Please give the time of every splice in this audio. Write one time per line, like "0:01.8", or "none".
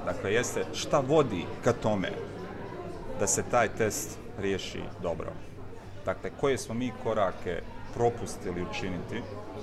none